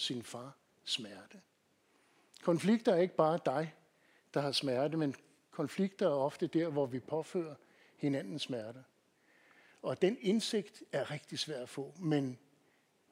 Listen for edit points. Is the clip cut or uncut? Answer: uncut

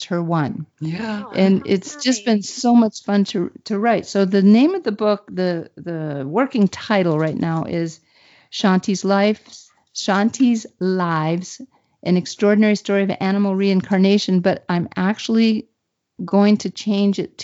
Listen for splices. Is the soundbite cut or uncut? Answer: uncut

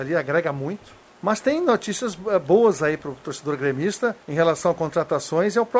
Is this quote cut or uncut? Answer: cut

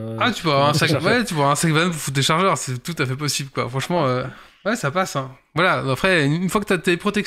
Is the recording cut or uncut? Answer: uncut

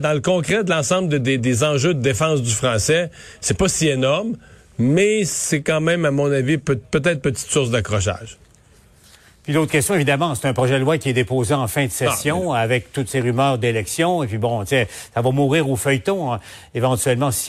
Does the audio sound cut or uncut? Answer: uncut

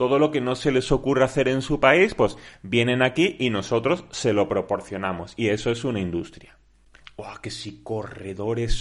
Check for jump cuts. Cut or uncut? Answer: cut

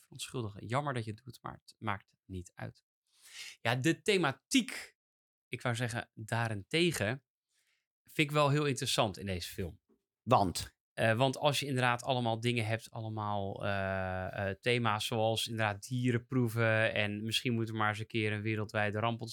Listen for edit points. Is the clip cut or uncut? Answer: uncut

